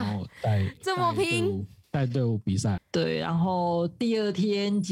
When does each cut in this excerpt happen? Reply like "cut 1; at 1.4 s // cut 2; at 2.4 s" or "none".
cut 1; at 2.8 s